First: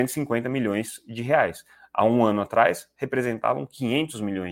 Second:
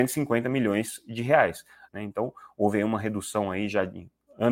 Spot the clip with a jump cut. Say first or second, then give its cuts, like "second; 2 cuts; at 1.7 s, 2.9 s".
second; 1 cut; at 1.9 s